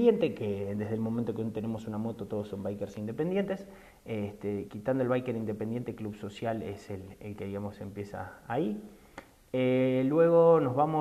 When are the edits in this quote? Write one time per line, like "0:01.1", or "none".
none